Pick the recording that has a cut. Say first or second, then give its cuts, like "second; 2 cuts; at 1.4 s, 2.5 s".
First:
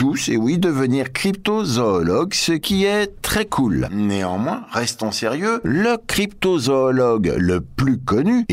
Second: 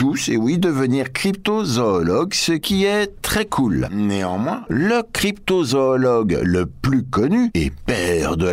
second; 1 cut; at 4.7 s